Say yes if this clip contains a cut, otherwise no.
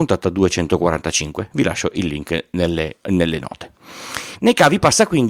no